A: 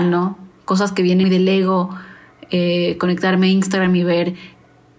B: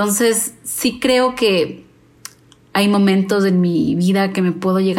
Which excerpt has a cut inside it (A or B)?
A